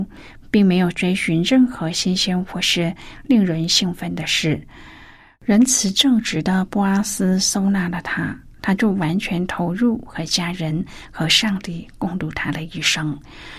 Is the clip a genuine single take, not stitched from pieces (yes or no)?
yes